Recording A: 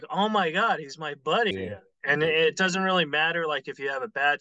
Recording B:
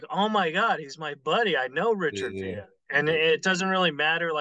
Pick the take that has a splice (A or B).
A